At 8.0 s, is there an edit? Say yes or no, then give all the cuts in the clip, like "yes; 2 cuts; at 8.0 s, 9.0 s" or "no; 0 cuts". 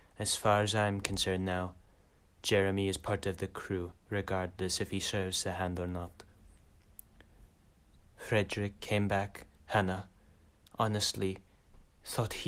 yes; 1 cut; at 8.0 s